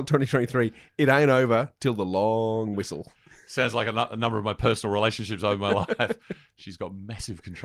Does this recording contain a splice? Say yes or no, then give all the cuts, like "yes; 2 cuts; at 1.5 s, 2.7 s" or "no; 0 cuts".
no; 0 cuts